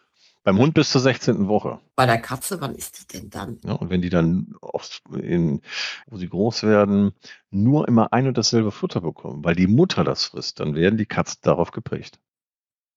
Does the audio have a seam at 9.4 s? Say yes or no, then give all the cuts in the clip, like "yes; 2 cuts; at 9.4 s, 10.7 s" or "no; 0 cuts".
no; 3 cuts; at 1.9 s, 3.6 s, 6.0 s